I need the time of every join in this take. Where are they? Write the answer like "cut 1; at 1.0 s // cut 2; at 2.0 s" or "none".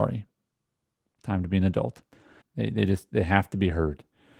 cut 1; at 2.4 s